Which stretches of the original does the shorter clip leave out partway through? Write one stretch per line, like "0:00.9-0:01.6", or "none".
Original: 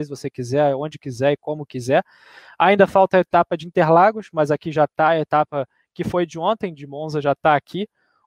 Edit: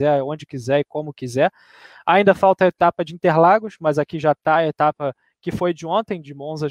none